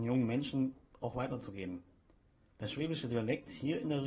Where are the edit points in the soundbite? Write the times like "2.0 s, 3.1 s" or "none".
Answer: none